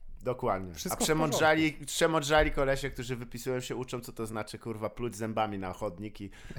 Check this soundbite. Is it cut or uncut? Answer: uncut